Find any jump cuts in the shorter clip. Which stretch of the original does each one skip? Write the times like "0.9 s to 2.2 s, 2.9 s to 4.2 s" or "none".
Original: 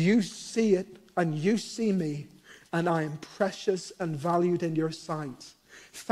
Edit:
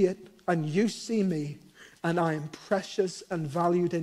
none